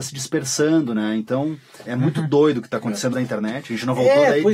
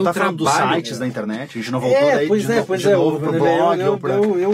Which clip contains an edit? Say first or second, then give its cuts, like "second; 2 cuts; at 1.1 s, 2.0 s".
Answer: first; 2 cuts; at 1.9 s, 3.1 s